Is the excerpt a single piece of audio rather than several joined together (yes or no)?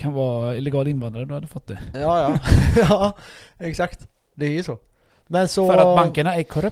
yes